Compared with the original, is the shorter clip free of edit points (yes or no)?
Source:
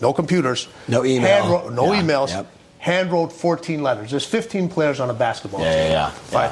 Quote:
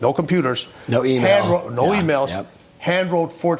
yes